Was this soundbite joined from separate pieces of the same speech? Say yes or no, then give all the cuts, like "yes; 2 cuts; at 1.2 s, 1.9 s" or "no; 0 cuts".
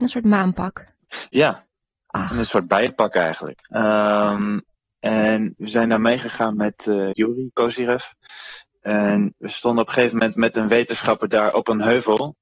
yes; 2 cuts; at 3.6 s, 7.1 s